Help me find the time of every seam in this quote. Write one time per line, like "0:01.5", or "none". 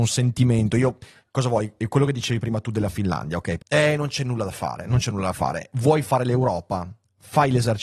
0:03.6